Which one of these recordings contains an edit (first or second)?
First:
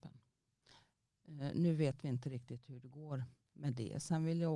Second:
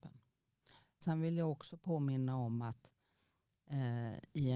second